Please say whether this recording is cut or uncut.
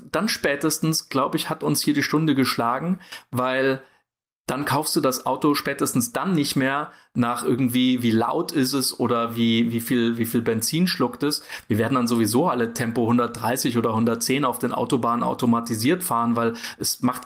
uncut